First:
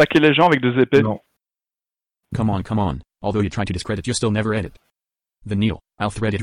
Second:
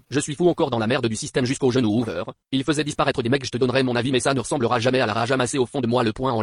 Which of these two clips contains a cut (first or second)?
first